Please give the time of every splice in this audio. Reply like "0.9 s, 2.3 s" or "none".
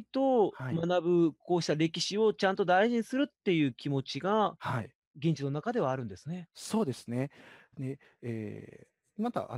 none